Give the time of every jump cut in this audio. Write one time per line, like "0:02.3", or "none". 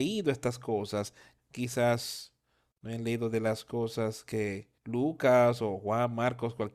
0:01.4
0:04.8